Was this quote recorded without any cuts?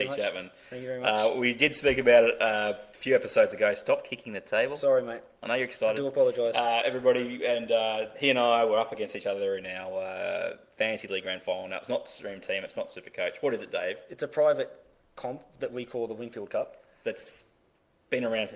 yes; 0 cuts

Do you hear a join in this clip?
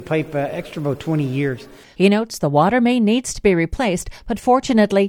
yes; 1 cut; at 1.9 s

